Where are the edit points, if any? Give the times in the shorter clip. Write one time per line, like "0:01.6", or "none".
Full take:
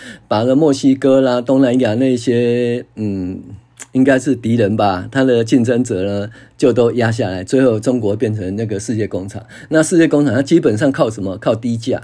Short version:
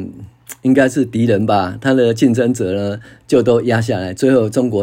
none